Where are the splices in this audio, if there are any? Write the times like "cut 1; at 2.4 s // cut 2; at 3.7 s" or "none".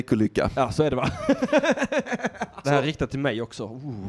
cut 1; at 2.6 s